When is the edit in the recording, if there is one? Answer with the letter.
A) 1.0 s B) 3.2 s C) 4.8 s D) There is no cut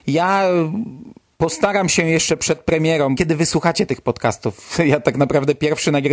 B